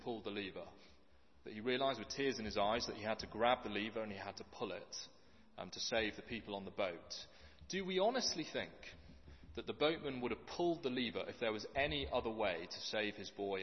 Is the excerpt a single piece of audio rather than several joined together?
yes; 0 cuts

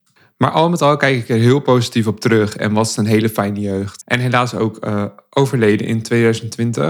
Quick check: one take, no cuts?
no; 1 cut; at 4.0 s

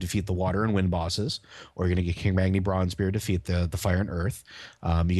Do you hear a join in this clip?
no; 0 cuts

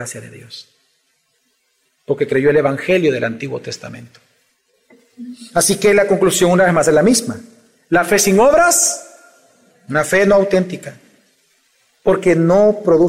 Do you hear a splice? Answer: no; 0 cuts

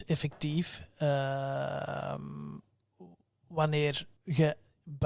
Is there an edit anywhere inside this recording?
yes; 1 cut; at 4.2 s

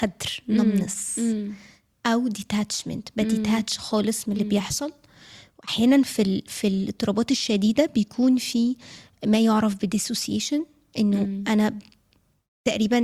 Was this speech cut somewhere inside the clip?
no; 0 cuts

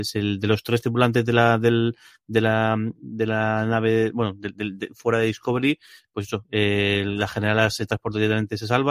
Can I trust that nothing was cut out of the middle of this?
yes; 0 cuts

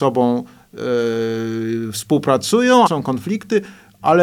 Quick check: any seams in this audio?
yes; 1 cut; at 2.9 s

